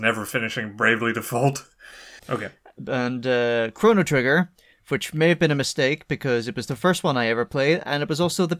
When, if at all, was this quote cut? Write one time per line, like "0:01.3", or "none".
0:02.2